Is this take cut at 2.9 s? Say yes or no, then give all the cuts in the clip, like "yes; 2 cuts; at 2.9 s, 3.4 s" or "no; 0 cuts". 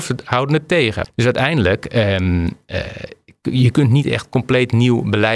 no; 1 cut; at 1.0 s